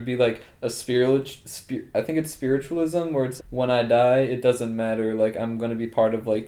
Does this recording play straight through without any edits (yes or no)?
no